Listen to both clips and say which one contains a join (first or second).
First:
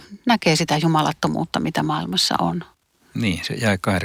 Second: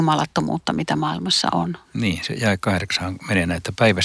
second